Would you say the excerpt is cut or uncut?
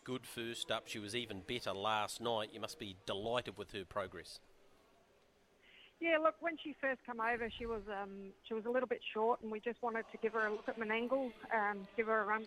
uncut